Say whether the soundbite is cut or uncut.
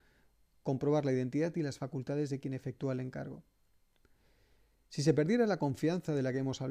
uncut